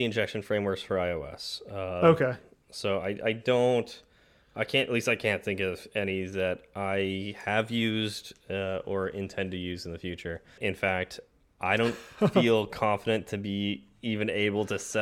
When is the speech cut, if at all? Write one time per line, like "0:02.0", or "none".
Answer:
0:10.6